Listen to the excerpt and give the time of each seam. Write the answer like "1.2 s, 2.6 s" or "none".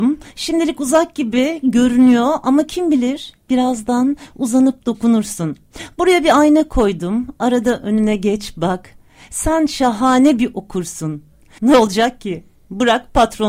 11.6 s